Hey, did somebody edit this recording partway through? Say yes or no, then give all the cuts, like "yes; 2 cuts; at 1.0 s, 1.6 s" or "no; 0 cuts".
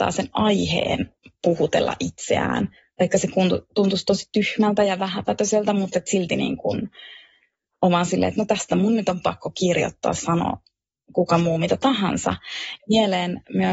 yes; 1 cut; at 12.8 s